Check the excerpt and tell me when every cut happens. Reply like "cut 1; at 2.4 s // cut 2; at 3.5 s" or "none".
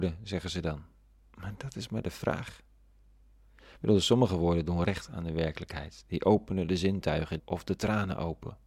cut 1; at 7.4 s